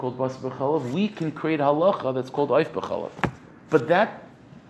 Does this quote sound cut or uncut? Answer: cut